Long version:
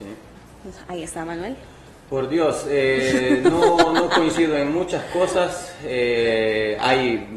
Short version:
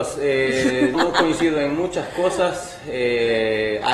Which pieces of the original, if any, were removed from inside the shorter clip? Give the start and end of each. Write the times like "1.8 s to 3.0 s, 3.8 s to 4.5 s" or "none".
3.4 s to 3.9 s